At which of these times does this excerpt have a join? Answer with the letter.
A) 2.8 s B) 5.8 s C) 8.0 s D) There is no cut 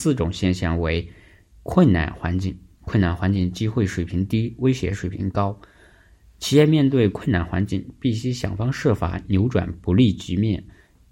D